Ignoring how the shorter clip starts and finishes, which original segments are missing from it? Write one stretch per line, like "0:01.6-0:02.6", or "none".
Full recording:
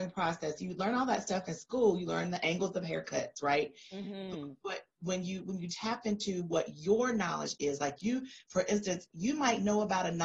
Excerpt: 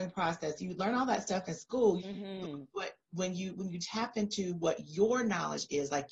0:02.0-0:03.9